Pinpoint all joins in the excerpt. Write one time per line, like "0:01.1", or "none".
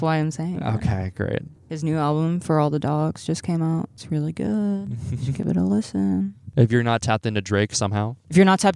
none